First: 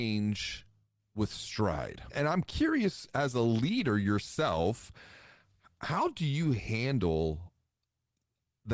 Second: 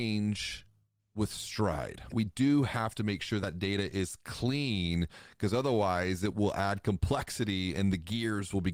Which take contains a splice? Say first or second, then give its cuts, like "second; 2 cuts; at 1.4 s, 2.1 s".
second; 1 cut; at 2.1 s